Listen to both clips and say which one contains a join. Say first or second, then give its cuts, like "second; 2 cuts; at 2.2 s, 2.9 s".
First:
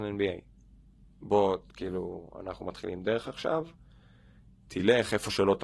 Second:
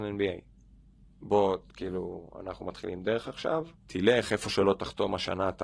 second; 1 cut; at 3.8 s